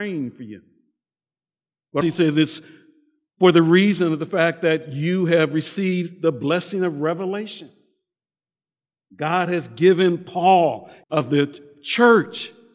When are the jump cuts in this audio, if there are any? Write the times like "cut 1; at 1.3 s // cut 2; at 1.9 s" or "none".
cut 1; at 2.0 s // cut 2; at 11.0 s